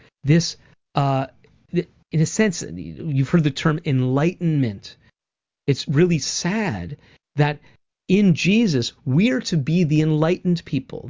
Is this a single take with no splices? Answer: yes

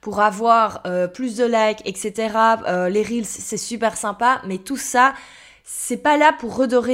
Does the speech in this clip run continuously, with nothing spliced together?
yes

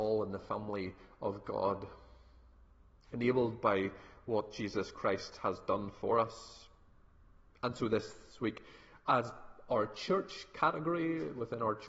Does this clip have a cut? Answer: no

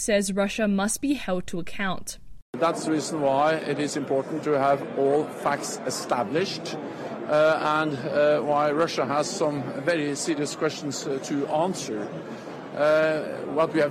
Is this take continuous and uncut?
no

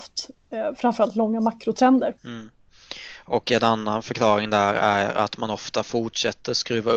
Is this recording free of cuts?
no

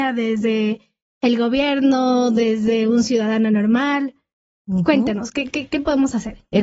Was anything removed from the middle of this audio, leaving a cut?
no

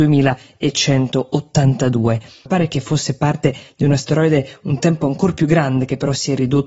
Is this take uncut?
no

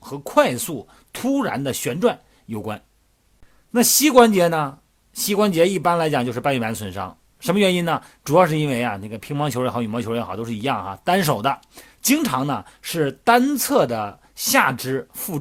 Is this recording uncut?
yes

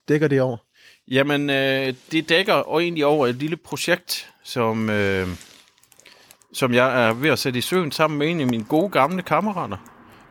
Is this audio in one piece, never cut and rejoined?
yes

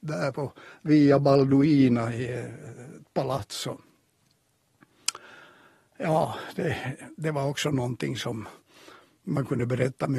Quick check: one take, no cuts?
yes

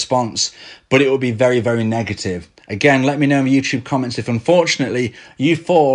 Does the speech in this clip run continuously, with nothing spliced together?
no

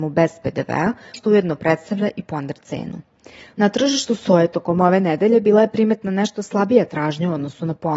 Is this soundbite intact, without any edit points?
no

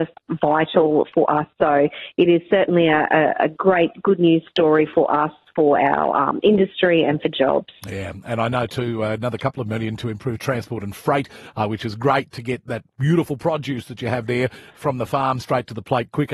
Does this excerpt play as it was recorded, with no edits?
yes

